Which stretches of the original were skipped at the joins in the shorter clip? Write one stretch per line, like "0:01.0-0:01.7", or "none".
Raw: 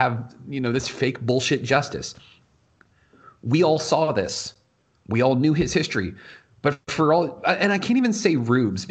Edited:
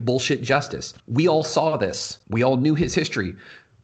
0:02.2-0:03.4
0:04.6-0:05.0